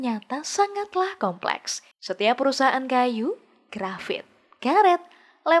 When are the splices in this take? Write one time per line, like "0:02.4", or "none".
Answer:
0:01.9